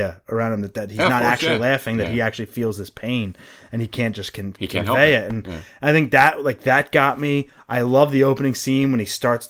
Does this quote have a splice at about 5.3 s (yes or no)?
no